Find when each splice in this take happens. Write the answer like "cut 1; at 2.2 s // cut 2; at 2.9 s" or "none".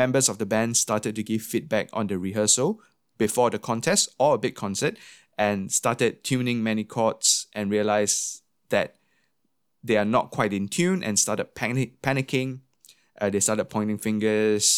none